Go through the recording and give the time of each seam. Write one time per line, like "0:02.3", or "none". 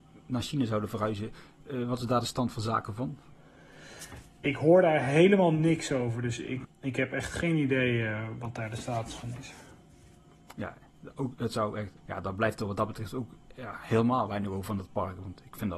0:06.6
0:12.0